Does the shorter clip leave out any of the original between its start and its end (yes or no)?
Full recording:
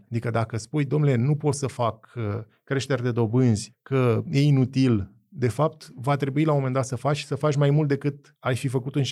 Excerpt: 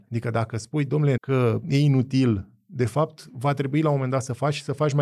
yes